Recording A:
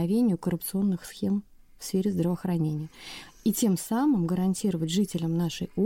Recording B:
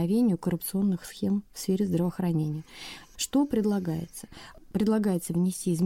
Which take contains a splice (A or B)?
B